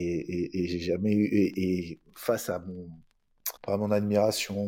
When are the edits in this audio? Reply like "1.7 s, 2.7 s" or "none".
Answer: 3.6 s